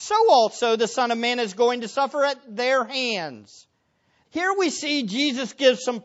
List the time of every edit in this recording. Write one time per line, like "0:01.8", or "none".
0:04.2